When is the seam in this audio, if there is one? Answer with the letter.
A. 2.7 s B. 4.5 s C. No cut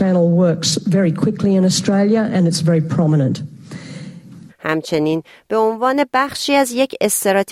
B